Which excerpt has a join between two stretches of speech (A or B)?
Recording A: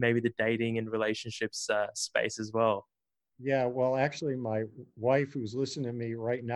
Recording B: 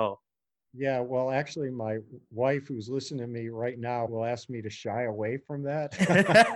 B